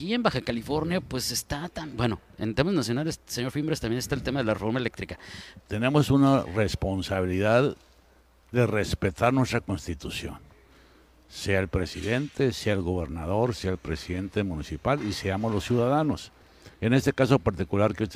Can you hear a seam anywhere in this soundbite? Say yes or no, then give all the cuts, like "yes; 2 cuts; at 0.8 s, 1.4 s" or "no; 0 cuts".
yes; 2 cuts; at 5.6 s, 16.7 s